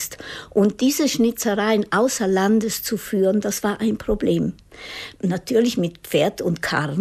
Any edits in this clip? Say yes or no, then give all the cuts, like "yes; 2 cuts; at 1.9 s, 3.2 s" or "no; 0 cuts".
yes; 1 cut; at 5.1 s